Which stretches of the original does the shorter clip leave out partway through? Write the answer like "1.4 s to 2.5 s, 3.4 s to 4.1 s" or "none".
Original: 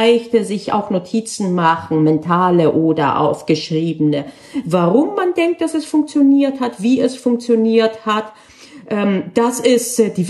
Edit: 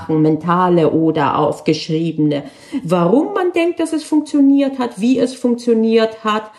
none

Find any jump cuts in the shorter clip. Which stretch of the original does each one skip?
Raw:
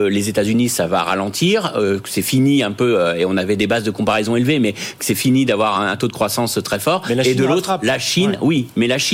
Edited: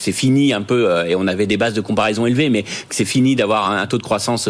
none

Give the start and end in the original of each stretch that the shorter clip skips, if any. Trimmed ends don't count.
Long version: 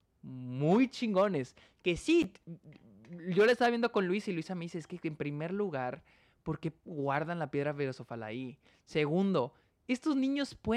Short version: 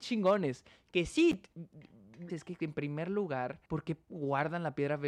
3.2 s to 4.7 s, 6.1 s to 6.4 s

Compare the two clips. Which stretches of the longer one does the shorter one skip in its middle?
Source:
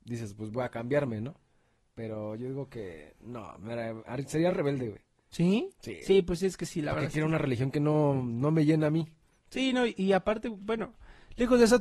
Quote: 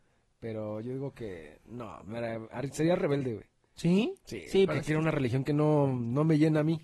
6.2 s to 6.9 s

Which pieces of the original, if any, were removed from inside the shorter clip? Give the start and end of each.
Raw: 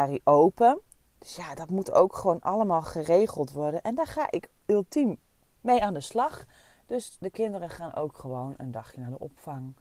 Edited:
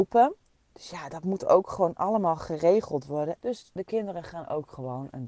3.8 s to 6.8 s

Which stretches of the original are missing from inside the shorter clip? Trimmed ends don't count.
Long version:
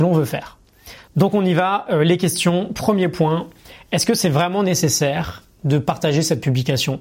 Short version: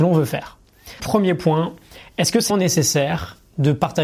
1.0 s to 2.7 s, 4.2 s to 4.6 s

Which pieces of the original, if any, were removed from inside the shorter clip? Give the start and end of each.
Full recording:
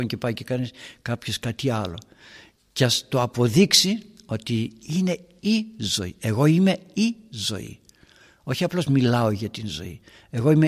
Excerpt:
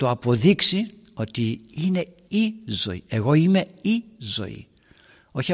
none

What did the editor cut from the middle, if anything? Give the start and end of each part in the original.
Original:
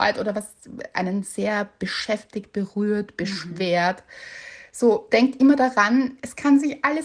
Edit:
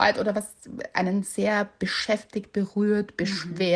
none

